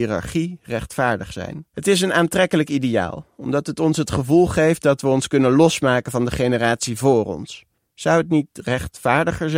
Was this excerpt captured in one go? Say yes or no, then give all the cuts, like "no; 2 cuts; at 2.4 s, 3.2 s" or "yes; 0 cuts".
no; 2 cuts; at 1.7 s, 7.8 s